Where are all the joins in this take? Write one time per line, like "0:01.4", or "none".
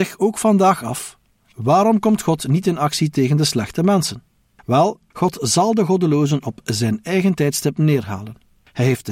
0:05.1